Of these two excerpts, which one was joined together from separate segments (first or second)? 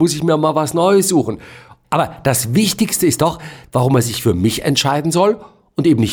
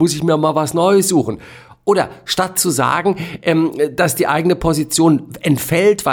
first